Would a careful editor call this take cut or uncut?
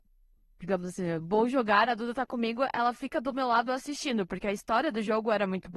uncut